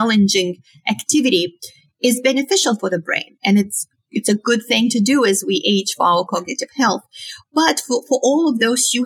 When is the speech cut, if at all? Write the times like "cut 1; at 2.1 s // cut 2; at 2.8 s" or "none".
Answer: none